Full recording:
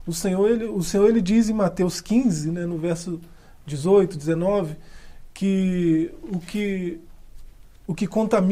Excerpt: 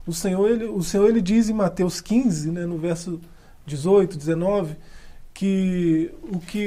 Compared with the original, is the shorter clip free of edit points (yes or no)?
yes